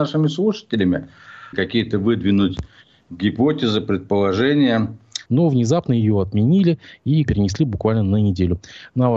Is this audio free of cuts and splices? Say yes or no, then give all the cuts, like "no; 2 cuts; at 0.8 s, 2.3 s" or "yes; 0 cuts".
no; 3 cuts; at 1.5 s, 5.3 s, 7.3 s